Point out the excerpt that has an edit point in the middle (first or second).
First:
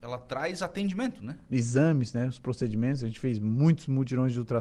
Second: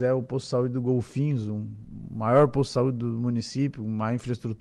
first